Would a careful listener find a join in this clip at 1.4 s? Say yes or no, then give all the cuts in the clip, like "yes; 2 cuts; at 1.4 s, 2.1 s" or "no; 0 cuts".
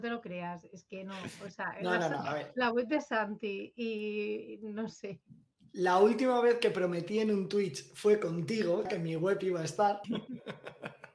no; 2 cuts; at 8.9 s, 10.0 s